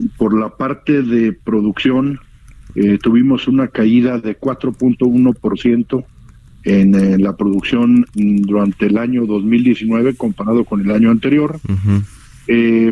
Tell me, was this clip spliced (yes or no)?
no